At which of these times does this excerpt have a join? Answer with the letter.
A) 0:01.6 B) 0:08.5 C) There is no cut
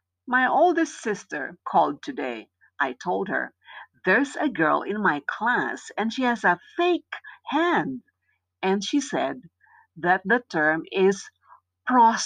A